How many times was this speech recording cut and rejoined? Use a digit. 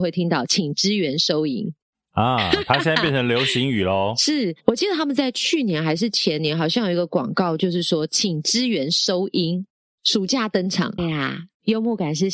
1